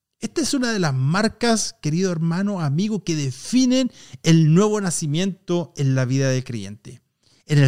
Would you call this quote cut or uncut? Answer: uncut